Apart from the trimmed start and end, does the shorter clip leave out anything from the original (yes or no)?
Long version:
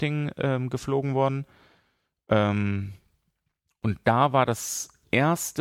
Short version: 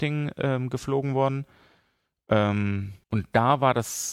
yes